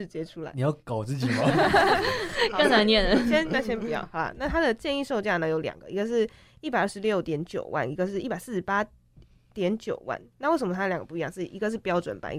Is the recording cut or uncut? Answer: uncut